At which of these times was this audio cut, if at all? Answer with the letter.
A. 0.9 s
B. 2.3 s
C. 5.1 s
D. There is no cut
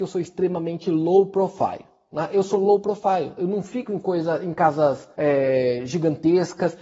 C